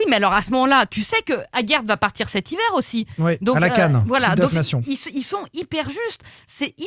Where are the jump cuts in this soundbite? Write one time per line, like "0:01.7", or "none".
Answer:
0:04.5